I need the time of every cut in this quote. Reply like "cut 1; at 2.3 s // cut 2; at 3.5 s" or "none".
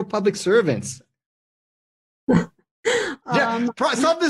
none